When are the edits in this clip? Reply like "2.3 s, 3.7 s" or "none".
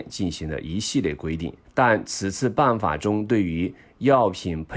1.6 s